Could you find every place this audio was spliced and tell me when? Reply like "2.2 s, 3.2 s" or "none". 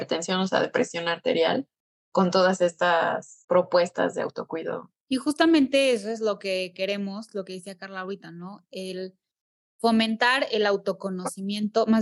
none